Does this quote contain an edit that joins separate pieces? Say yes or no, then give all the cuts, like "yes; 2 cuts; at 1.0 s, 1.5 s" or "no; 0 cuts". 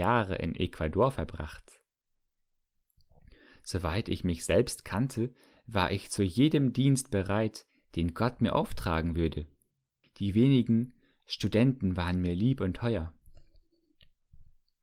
yes; 1 cut; at 10.0 s